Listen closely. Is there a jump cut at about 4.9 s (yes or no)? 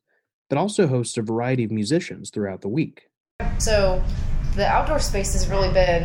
no